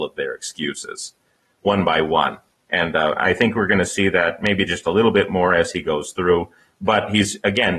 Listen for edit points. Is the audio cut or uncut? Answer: uncut